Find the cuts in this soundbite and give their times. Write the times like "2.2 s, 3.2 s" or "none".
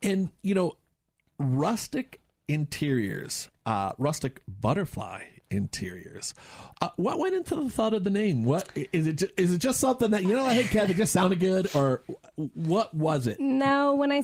none